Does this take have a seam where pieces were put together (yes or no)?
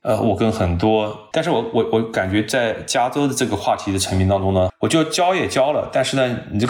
yes